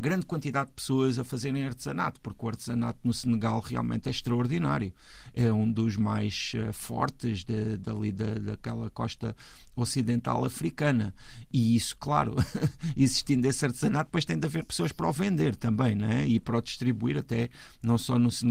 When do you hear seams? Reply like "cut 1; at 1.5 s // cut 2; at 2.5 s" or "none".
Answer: none